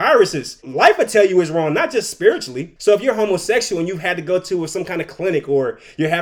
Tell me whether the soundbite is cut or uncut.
uncut